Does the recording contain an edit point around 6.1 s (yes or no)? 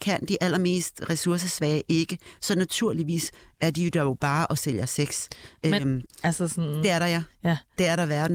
yes